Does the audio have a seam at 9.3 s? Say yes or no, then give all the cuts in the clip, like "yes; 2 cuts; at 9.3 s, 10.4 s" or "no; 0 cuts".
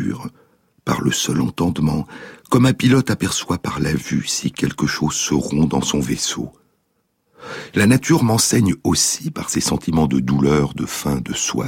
no; 1 cut; at 7.7 s